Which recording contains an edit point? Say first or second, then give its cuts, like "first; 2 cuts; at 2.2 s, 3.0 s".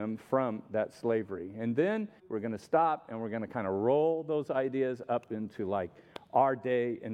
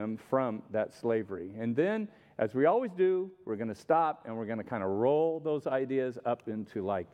first; 1 cut; at 2.2 s